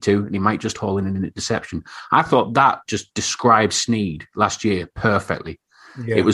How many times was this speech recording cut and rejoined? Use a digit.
0